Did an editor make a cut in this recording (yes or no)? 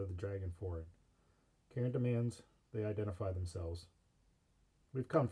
no